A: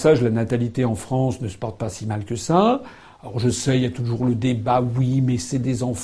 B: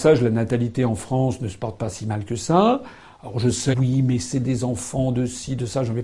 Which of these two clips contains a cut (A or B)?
B